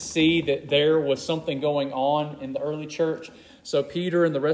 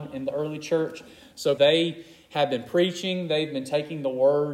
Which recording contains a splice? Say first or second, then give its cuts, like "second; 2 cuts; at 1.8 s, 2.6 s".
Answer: second; 1 cut; at 1.6 s